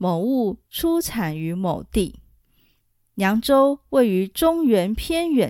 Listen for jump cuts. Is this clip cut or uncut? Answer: uncut